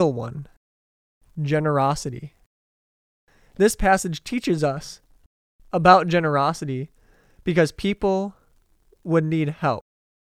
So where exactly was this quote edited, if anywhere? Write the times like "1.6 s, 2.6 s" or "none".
none